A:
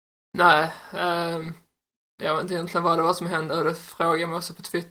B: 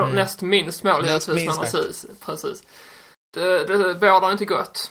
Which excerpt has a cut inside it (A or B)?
B